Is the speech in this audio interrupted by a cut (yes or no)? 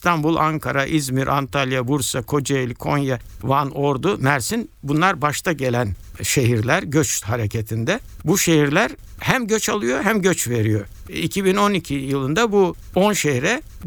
no